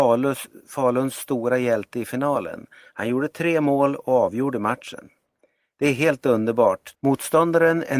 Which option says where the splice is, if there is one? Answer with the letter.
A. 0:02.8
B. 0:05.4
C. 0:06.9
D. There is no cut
C